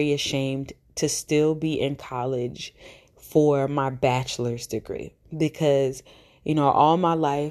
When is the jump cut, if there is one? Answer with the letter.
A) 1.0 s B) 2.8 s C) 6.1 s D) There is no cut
D